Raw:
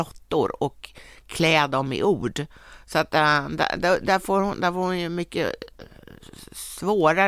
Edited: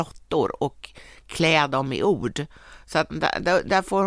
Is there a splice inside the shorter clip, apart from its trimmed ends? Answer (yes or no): yes